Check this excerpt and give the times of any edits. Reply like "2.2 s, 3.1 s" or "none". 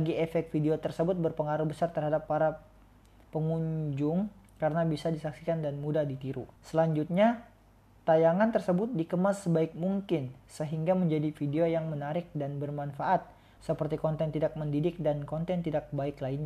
6.6 s, 13.6 s